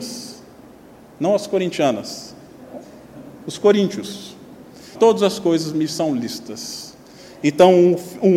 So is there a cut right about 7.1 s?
no; 1 cut; at 5.0 s

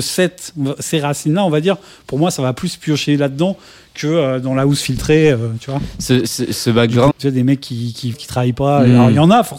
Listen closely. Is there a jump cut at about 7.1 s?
yes; 2 cuts; at 7.1 s, 8.1 s

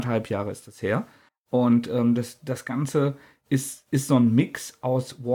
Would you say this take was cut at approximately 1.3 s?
yes; 1 cut; at 1.3 s

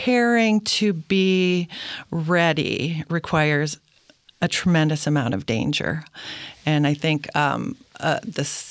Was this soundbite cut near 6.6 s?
no; 0 cuts

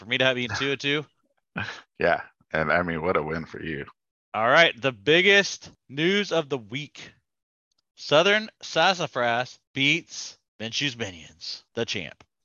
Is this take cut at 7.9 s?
no; 2 cuts; at 1.4 s, 4.2 s

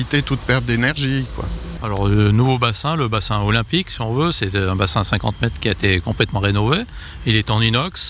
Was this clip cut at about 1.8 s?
yes; 1 cut; at 1.8 s

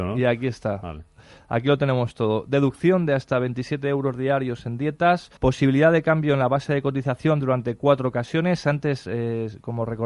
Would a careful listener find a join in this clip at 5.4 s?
yes; 1 cut; at 5.4 s

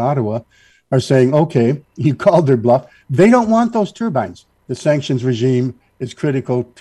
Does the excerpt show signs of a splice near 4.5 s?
yes; 1 cut; at 4.5 s

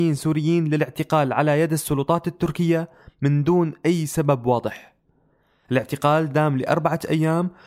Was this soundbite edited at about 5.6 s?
yes; 1 cut; at 5.6 s

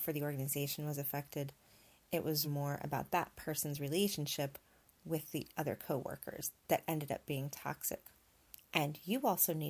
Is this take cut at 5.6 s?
no; 2 cuts; at 2.4 s, 8.6 s

